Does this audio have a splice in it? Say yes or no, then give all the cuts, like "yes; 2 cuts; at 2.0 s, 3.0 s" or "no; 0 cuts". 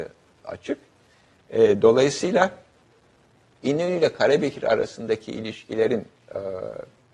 no; 0 cuts